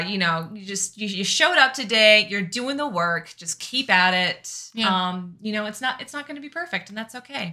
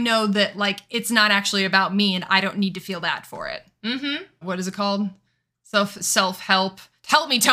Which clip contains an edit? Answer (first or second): second